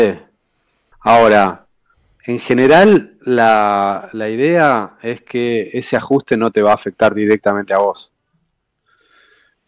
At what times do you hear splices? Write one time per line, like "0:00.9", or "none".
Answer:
0:00.9